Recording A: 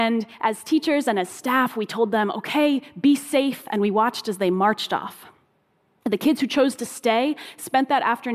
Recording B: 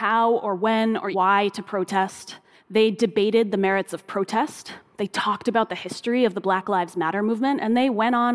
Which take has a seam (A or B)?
B